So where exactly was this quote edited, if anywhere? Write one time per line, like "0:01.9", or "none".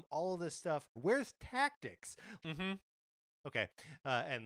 0:01.0
0:02.4

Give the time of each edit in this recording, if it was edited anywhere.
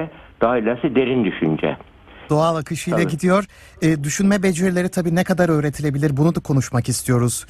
0:02.3

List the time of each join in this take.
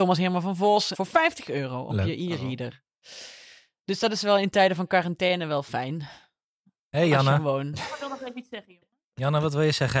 0:00.9

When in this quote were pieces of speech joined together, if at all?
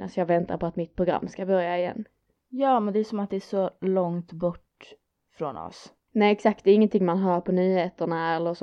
0:06.1

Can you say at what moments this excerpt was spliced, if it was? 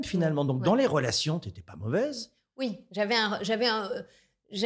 none

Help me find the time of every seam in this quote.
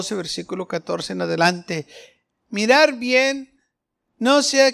none

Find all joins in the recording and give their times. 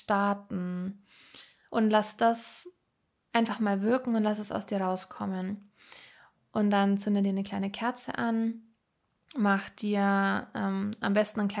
0:01.7

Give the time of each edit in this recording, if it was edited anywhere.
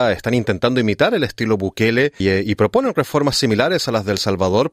0:02.2

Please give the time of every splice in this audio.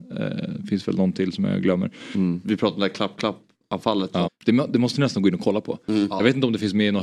0:02.4
0:04.2

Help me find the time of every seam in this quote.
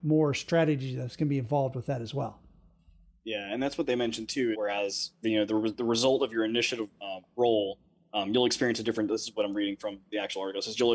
0:04.5

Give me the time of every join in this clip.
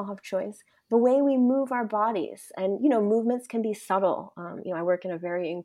none

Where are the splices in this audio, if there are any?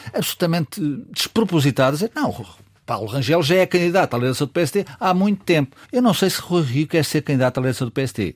0:05.8

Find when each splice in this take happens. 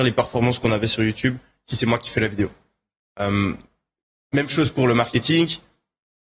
none

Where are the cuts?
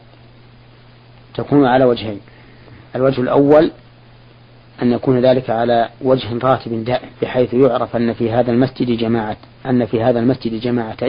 0:02.9
0:05.9
0:07.2

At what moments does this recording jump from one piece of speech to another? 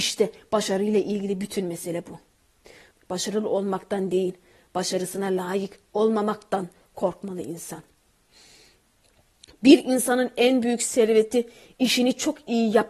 0:02.9

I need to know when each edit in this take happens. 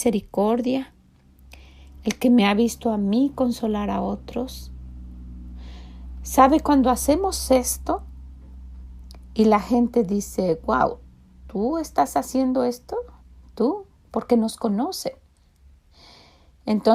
none

